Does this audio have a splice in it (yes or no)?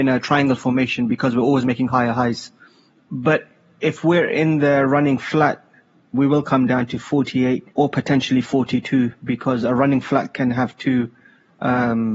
yes